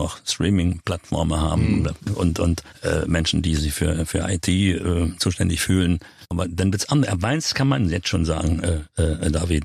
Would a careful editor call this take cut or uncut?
cut